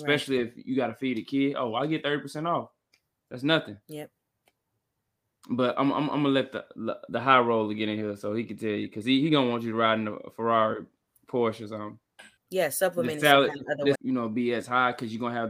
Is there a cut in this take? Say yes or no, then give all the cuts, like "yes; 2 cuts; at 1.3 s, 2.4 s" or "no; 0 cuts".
yes; 3 cuts; at 3.8 s, 12.4 s, 13.9 s